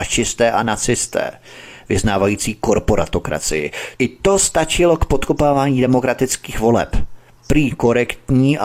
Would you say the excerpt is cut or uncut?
cut